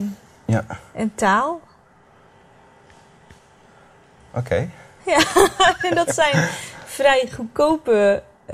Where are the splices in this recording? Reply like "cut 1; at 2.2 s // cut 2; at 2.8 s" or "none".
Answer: none